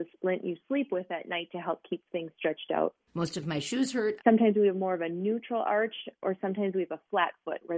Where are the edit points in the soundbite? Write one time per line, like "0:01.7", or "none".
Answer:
0:03.1
0:04.2